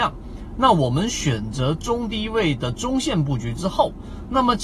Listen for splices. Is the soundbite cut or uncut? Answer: uncut